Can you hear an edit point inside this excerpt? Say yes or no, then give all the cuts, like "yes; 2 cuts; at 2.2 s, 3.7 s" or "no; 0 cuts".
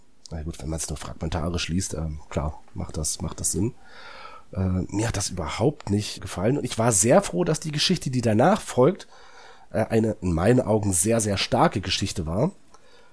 yes; 1 cut; at 6.2 s